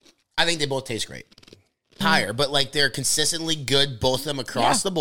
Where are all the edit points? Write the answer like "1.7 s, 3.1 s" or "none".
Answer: 2.0 s

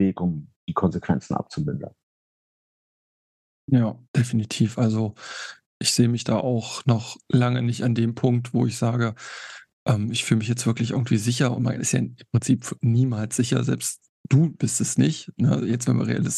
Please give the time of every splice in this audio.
none

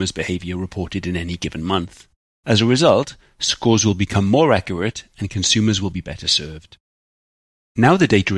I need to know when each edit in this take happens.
none

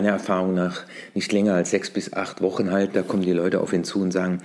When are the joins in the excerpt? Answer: 2.9 s

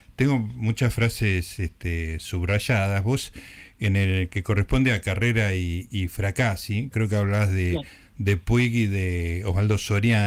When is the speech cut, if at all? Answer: 6.9 s

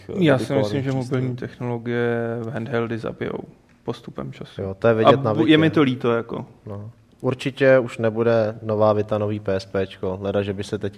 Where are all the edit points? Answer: none

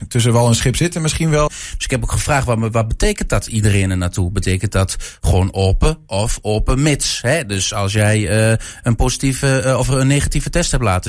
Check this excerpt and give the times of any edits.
1.5 s

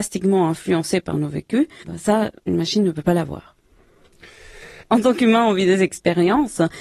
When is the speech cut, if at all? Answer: 1.8 s, 4.8 s

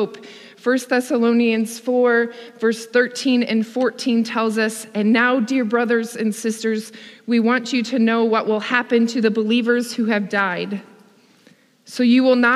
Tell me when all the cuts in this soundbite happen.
none

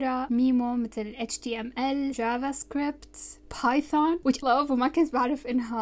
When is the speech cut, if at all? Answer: 2.1 s, 4.4 s

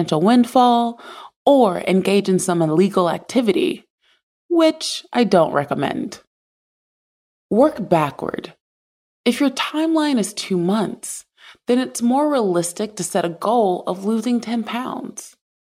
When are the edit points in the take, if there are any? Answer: none

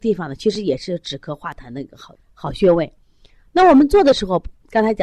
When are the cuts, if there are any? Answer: 2.1 s

